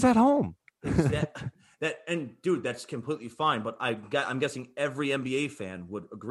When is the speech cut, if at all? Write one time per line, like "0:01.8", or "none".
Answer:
none